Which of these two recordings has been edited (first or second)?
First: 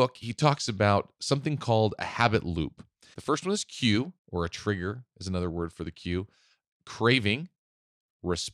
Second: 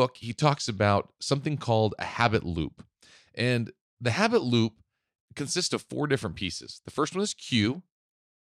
first